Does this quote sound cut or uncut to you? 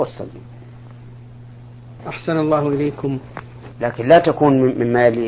cut